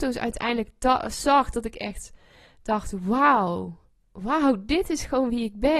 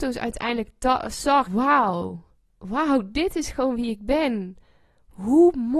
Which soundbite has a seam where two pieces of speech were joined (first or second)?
second